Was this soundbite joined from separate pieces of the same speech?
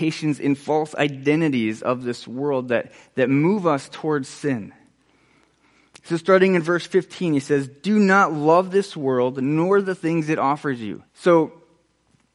yes; 1 cut; at 11.1 s

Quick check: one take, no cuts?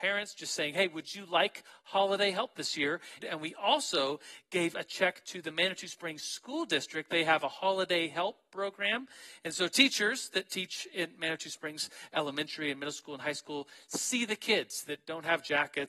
no; 1 cut; at 3.2 s

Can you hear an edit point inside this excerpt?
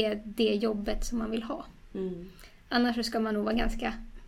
no; 0 cuts

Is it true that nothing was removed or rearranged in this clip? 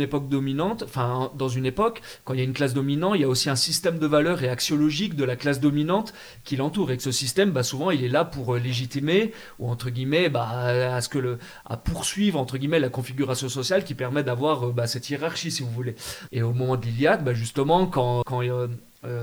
no; 3 cuts; at 11.6 s, 16.3 s, 18.2 s

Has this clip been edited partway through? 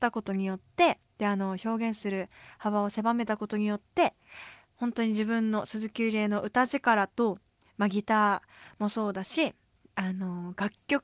no; 0 cuts

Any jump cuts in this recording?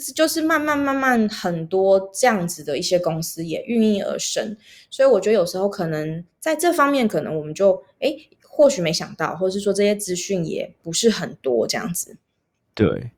no; 0 cuts

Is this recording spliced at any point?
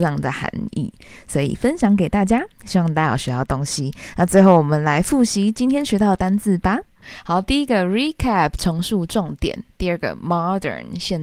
no; 0 cuts

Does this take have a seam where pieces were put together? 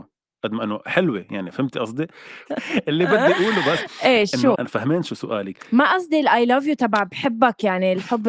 yes; 2 cuts; at 2.5 s, 4.5 s

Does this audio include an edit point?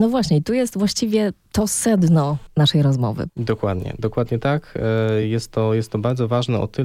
no; 0 cuts

